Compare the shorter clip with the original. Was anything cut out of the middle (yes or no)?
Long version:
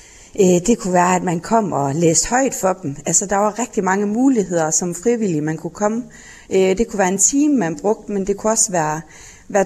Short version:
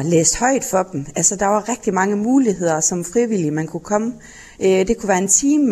no